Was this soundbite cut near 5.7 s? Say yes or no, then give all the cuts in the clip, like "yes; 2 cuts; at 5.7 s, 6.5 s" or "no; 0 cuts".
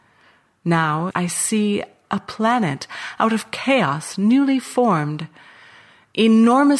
no; 1 cut; at 1.1 s